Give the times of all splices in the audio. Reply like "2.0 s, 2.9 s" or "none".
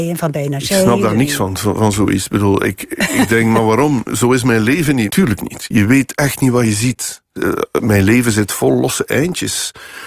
5.1 s, 7.4 s

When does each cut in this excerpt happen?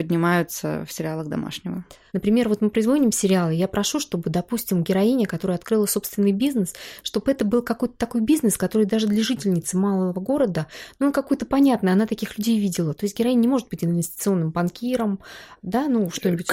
2.1 s

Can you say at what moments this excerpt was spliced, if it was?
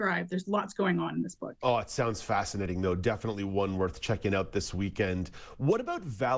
none

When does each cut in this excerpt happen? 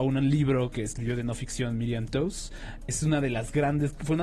2.9 s

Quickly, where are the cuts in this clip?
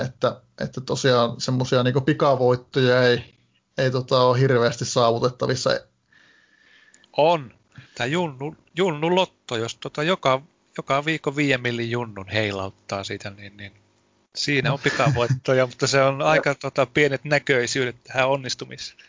7.9 s

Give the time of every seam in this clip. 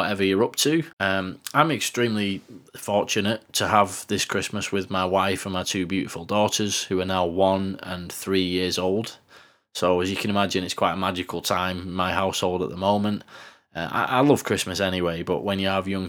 0.9 s

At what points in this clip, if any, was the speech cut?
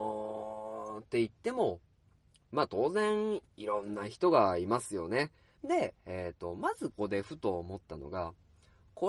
5.6 s, 6.9 s

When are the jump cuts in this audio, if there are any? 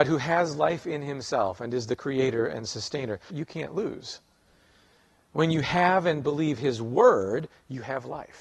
3.3 s

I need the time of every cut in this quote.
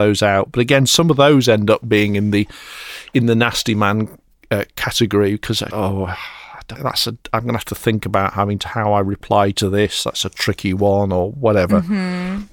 5.7 s, 6.8 s

